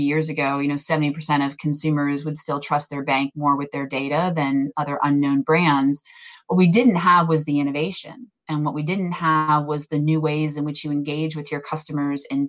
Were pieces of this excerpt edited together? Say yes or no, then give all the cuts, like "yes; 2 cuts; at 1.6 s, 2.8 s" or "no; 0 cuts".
no; 0 cuts